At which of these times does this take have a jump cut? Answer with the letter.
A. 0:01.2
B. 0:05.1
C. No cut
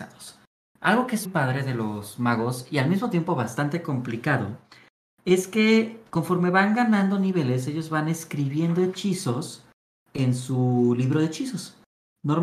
A